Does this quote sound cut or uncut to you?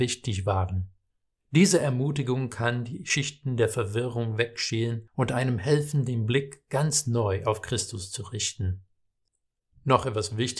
cut